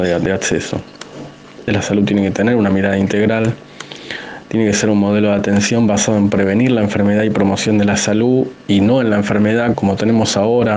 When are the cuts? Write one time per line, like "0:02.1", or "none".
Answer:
0:01.7
0:09.7